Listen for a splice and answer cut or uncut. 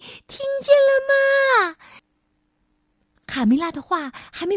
cut